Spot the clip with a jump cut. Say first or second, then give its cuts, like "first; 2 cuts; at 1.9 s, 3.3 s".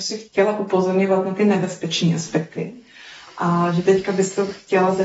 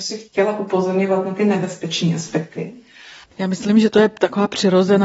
second; 1 cut; at 3.2 s